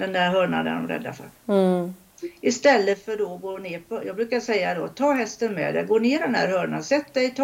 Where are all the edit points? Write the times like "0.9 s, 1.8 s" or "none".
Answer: none